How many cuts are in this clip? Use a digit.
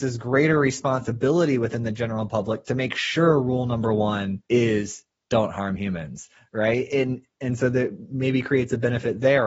1